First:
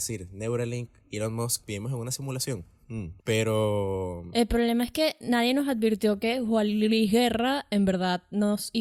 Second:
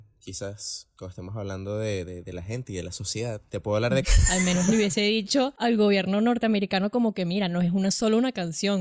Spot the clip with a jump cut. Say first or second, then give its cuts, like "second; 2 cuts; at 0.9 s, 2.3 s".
second; 1 cut; at 4.0 s